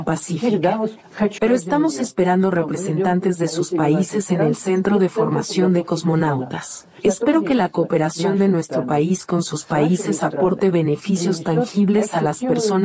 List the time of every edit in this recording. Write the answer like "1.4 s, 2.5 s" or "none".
1.4 s